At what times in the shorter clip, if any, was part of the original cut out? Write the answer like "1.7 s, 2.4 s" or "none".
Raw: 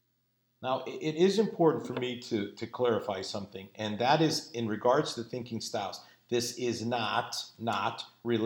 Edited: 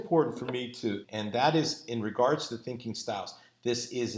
1.0 s